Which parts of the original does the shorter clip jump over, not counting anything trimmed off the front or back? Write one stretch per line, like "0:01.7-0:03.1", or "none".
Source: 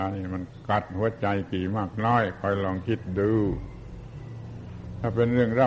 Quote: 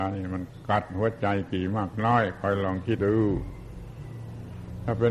0:03.0-0:03.1